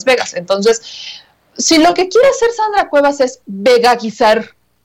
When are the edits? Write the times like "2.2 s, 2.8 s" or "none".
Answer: none